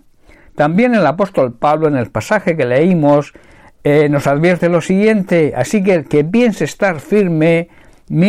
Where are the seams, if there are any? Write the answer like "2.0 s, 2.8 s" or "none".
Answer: none